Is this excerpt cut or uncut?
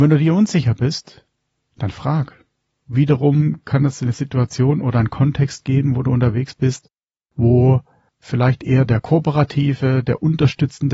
cut